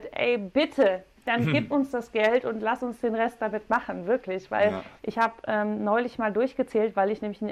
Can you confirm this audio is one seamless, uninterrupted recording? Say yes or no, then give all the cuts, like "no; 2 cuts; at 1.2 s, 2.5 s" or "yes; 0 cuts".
no; 1 cut; at 5.0 s